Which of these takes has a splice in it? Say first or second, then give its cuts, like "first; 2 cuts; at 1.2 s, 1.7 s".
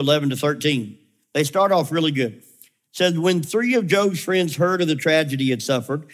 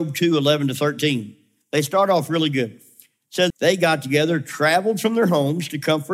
second; 1 cut; at 3.5 s